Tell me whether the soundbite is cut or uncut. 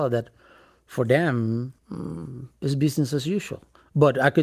cut